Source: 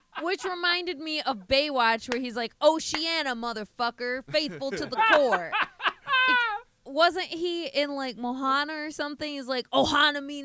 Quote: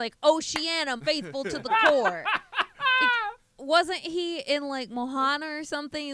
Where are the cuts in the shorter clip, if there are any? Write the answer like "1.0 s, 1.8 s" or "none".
1.0 s